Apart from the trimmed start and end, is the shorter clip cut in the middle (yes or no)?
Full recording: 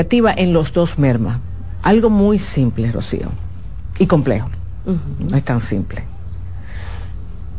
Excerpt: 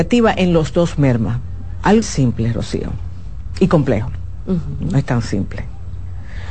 yes